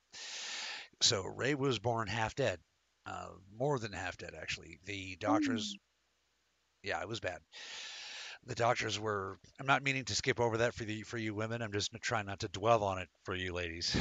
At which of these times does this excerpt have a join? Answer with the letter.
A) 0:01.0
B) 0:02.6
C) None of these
C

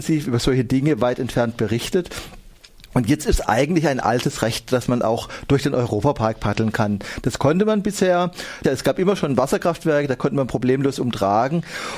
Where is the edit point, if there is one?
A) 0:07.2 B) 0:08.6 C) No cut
B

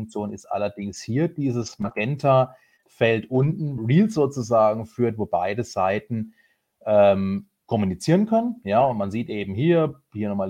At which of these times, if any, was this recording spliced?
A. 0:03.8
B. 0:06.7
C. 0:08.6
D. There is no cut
A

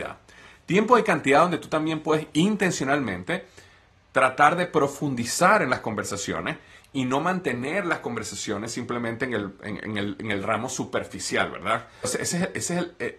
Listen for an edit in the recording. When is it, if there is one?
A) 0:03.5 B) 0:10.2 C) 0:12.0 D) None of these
C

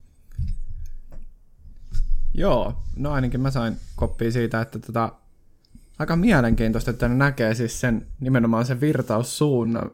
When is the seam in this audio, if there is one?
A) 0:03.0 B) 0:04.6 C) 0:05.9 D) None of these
D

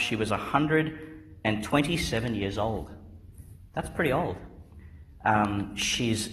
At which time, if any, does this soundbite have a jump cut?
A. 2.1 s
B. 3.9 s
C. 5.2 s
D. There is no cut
D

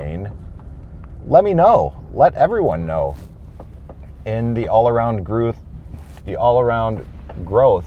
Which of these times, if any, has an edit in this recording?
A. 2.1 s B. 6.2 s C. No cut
B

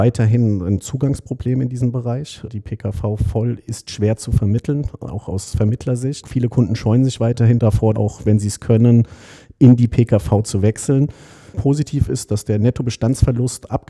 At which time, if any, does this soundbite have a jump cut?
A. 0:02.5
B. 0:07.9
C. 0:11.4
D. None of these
B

